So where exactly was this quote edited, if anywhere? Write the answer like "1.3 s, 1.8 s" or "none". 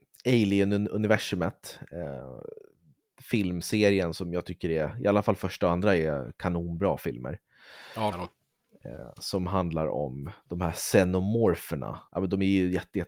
8.1 s, 12.1 s